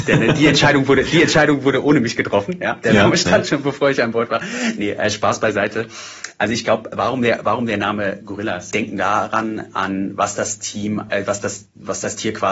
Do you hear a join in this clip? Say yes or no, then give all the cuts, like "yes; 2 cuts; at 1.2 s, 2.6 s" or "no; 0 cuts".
yes; 2 cuts; at 8.7 s, 11.1 s